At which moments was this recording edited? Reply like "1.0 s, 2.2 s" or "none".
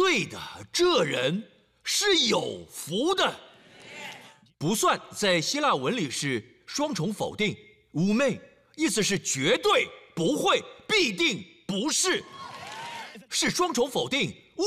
none